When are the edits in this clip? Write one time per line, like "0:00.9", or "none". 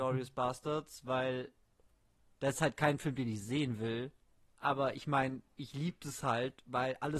none